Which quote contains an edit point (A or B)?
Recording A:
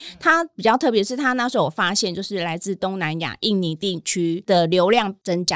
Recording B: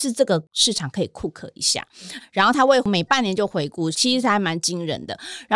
B